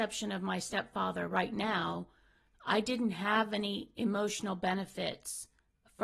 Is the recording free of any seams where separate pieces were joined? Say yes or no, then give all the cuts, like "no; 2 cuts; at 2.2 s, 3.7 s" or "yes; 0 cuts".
yes; 0 cuts